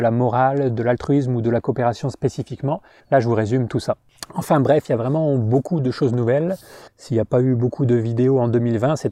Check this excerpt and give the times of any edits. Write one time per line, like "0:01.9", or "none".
0:03.0
0:06.9